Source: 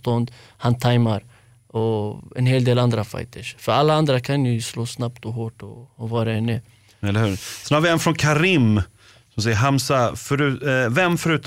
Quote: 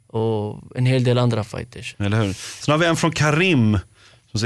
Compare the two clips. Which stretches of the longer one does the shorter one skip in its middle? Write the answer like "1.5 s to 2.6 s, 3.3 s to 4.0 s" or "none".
3.6 s to 7.0 s